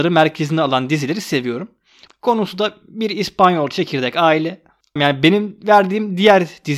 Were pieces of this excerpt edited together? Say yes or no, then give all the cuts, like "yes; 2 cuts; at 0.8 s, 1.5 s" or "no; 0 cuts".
yes; 2 cuts; at 2.1 s, 5.0 s